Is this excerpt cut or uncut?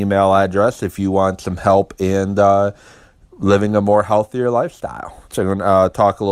cut